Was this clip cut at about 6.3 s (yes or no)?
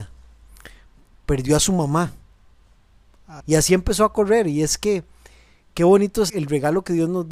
yes